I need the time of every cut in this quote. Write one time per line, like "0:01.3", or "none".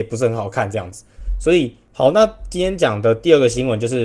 0:01.9